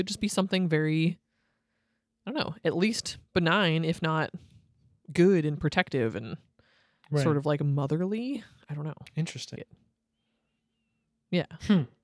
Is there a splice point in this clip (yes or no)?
yes